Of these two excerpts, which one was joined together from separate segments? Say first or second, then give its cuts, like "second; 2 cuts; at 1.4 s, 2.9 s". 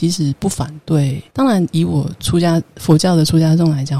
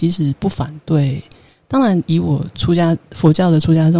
first; 1 cut; at 1.3 s